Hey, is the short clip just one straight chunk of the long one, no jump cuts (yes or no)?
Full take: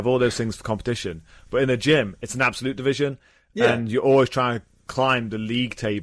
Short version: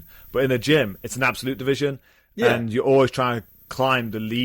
yes